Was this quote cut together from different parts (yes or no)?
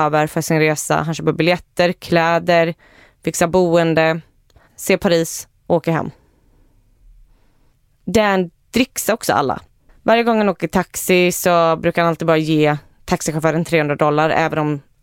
yes